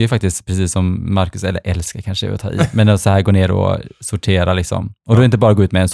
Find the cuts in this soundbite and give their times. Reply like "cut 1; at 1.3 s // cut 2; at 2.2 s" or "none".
none

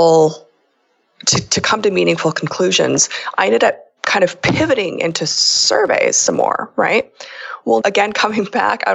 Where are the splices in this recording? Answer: cut 1; at 7.8 s

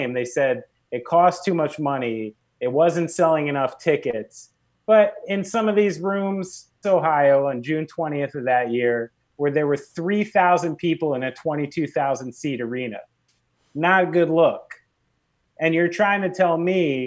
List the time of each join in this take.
cut 1; at 6.8 s

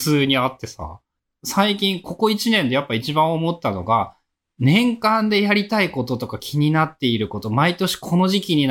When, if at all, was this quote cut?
none

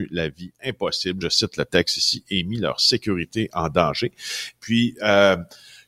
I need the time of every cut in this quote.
none

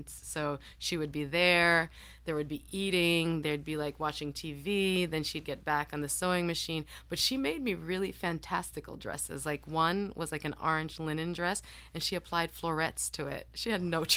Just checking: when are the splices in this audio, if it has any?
none

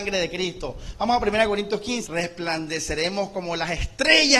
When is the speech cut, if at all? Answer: cut 1; at 2.0 s

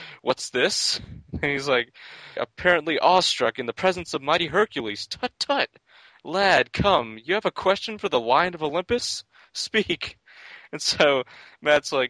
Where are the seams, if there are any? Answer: cut 1; at 2.4 s

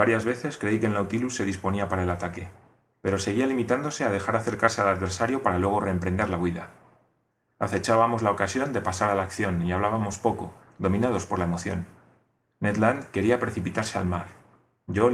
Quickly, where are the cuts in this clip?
cut 1; at 7.5 s

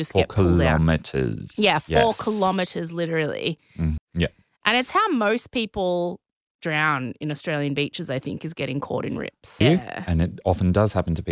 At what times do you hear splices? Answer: cut 1; at 4.0 s // cut 2; at 9.6 s

